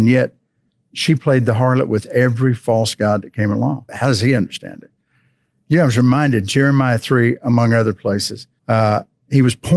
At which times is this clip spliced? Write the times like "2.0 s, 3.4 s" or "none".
3.9 s, 8.6 s